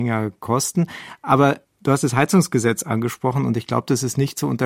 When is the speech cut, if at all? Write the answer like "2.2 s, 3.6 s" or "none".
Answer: none

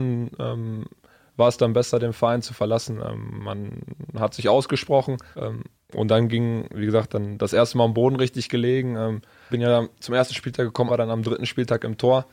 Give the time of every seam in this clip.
5.3 s, 9.5 s, 10.9 s

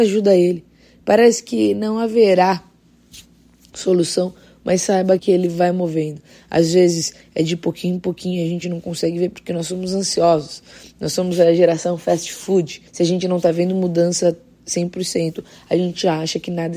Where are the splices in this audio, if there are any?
5.2 s, 12.9 s

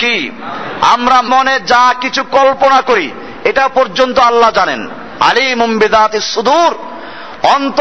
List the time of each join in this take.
1.3 s

